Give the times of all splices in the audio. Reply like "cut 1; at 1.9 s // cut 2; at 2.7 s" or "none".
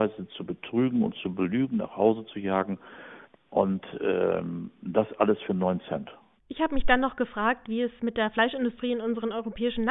cut 1; at 3.3 s // cut 2; at 6.4 s